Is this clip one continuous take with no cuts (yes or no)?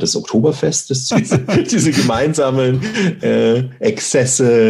no